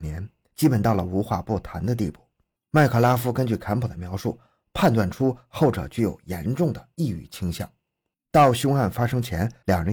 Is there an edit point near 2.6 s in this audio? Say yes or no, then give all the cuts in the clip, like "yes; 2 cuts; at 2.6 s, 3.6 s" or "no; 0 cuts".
yes; 2 cuts; at 2.6 s, 8.1 s